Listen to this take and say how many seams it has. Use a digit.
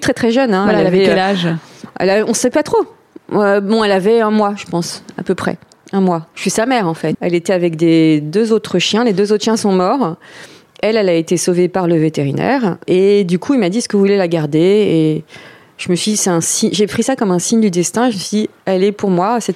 1